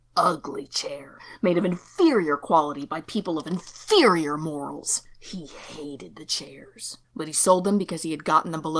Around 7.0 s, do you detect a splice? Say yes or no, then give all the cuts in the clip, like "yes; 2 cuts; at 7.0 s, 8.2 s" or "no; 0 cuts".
yes; 1 cut; at 7.0 s